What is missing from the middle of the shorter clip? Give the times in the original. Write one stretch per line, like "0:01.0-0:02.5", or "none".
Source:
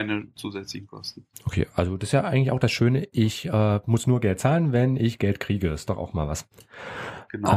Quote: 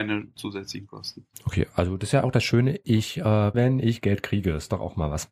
0:02.2-0:02.5
0:03.8-0:04.7

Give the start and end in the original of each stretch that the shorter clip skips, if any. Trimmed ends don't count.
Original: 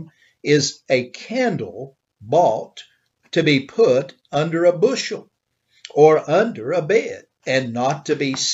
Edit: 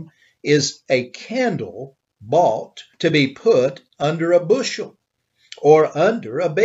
0:02.9-0:03.3

